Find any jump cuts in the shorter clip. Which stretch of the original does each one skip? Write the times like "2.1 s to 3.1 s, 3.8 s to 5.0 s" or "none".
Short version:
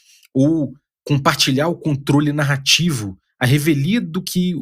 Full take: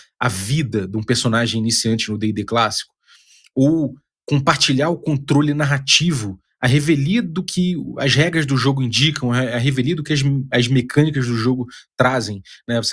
none